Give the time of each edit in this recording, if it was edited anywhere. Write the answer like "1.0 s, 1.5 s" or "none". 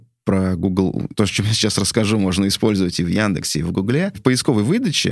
none